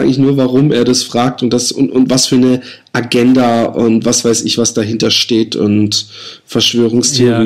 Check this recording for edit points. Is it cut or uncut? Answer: uncut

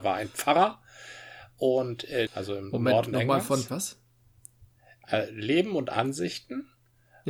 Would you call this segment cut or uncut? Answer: cut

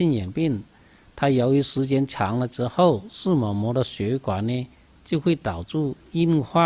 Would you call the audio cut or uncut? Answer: uncut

